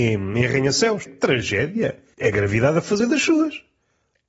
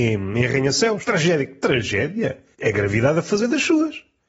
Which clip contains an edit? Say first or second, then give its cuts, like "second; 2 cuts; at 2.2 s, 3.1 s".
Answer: first; 1 cut; at 1.1 s